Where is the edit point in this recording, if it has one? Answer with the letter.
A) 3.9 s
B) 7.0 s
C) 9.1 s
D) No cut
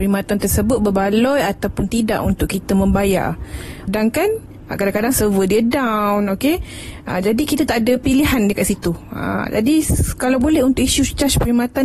A